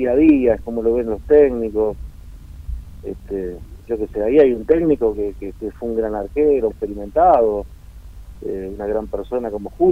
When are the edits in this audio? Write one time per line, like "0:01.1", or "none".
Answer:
0:06.7